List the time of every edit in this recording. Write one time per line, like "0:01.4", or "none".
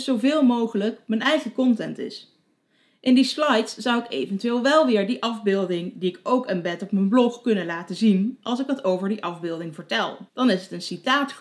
0:10.3